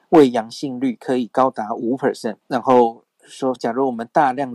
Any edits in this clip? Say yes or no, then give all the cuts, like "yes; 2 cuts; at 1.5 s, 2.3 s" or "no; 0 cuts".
yes; 2 cuts; at 2.4 s, 3.6 s